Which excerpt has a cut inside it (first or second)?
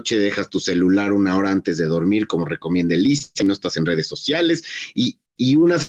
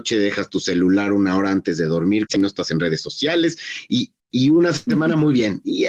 second